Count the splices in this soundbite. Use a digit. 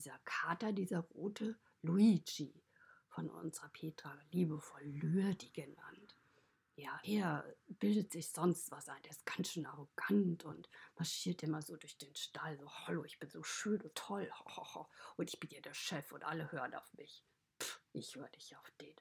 2